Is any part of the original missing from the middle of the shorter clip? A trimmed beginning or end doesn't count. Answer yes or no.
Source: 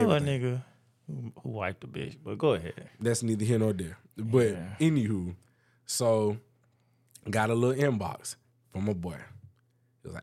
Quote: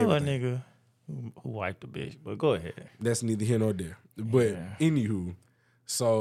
no